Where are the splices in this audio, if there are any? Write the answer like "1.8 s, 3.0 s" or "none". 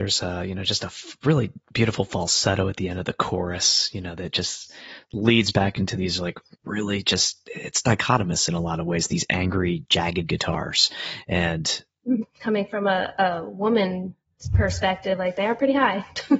12.2 s